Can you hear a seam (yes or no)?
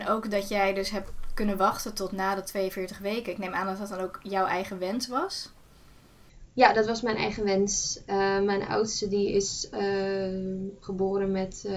no